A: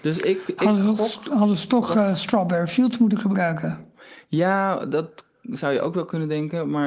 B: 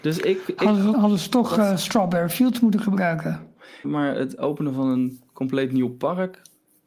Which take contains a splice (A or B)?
B